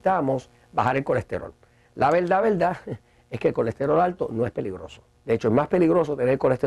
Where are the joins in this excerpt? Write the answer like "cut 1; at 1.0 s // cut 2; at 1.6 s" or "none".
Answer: cut 1; at 2.4 s